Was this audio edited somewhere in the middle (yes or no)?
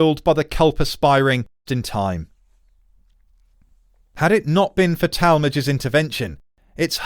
yes